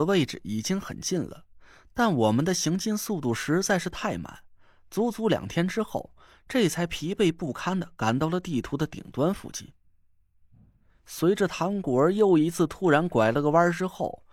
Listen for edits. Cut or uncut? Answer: uncut